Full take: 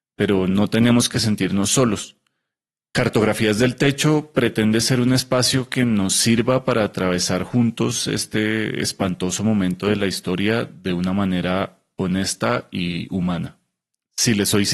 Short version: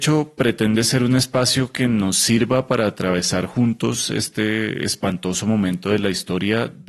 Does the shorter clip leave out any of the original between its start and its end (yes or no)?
no